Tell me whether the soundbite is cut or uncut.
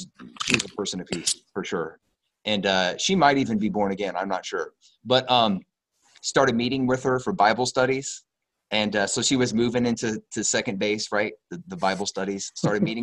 uncut